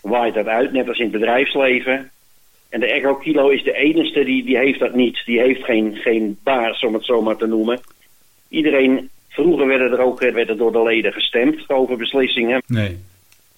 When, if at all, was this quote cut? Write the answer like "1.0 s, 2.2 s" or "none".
10.3 s, 12.6 s